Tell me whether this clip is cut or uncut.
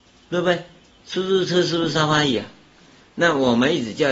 cut